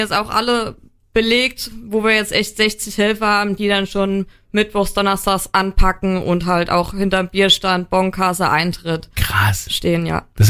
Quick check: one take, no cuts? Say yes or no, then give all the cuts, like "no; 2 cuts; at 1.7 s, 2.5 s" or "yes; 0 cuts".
yes; 0 cuts